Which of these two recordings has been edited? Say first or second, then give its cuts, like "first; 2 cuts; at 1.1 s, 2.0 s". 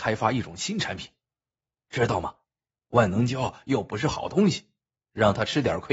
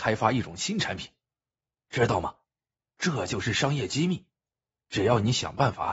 first; 1 cut; at 2.7 s